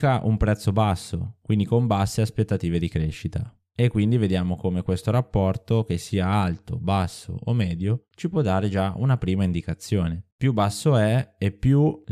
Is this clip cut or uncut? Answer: cut